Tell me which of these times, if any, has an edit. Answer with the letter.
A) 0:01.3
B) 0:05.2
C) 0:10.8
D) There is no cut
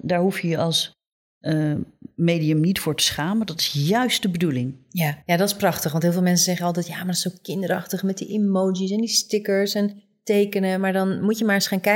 B